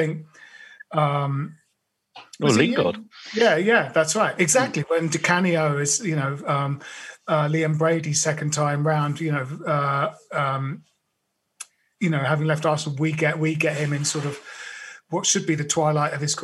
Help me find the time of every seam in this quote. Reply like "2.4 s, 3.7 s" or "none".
none